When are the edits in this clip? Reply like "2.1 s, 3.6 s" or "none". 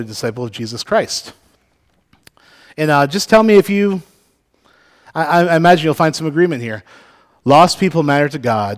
none